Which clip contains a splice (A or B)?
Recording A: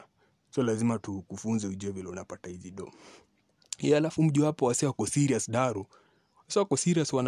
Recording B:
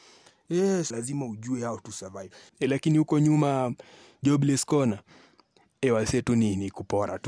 B